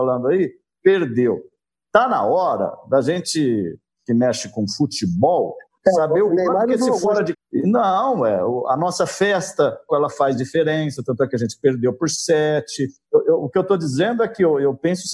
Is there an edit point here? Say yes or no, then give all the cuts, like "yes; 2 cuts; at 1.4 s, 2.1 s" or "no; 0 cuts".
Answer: yes; 3 cuts; at 7.3 s, 9.9 s, 13.1 s